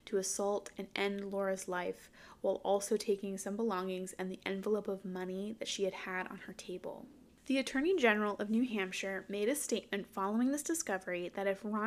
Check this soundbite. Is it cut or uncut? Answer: cut